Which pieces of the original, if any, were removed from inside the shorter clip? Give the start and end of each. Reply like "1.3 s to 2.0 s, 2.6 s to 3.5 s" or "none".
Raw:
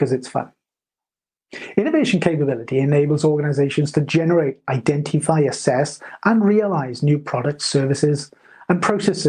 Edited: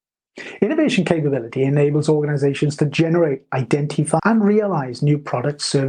5.3 s to 6.2 s